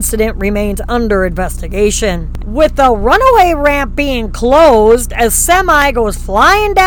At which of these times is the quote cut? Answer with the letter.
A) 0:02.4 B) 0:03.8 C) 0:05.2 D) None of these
A